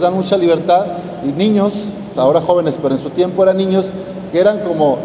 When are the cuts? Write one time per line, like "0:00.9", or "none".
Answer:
0:02.2